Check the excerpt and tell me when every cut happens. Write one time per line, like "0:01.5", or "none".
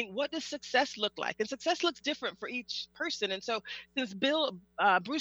none